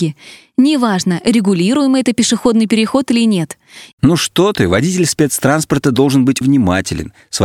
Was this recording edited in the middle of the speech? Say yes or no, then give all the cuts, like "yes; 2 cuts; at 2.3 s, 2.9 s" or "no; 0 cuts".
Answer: yes; 2 cuts; at 3.9 s, 6.4 s